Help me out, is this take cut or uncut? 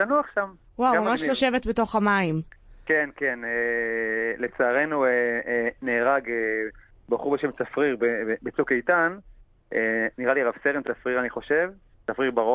uncut